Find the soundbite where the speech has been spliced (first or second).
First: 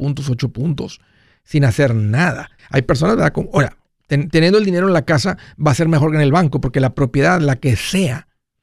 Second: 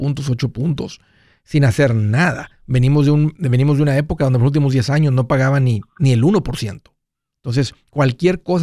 first